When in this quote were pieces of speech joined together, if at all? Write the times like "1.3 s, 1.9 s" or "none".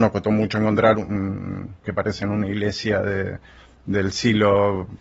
1.8 s